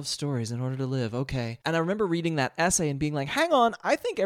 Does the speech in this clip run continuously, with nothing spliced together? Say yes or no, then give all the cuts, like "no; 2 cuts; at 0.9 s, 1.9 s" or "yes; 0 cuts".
no; 1 cut; at 1.6 s